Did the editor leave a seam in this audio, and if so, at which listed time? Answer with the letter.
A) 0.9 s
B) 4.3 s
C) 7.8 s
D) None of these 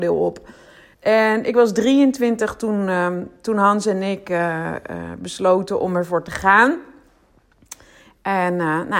A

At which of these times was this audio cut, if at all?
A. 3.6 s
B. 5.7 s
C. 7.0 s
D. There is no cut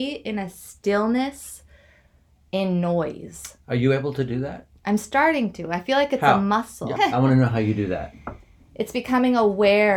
C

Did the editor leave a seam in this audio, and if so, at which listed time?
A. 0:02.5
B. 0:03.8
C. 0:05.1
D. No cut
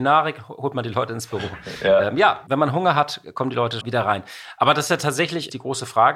B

